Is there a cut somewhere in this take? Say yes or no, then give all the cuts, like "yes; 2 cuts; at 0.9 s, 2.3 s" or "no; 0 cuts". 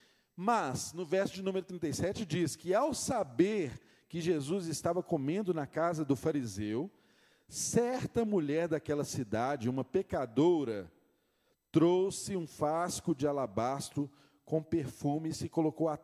no; 0 cuts